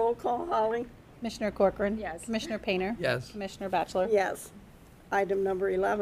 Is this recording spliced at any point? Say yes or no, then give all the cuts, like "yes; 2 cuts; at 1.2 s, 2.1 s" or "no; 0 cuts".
no; 0 cuts